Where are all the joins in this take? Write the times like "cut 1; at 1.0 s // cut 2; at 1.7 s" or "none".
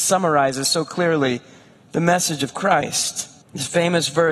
cut 1; at 3.4 s